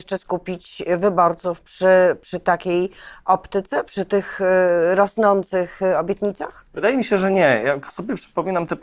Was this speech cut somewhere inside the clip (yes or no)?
no